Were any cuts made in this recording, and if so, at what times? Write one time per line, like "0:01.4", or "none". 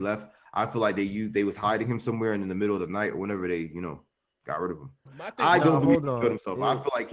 0:05.1